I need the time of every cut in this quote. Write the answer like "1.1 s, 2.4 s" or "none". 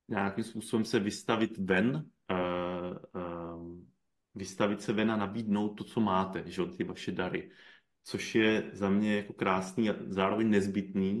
none